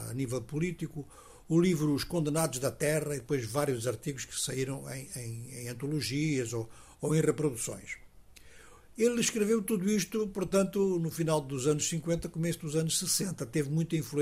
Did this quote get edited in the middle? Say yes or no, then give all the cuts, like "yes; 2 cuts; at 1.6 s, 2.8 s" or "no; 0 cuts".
no; 0 cuts